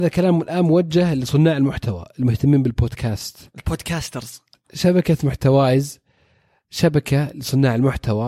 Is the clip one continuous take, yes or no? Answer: no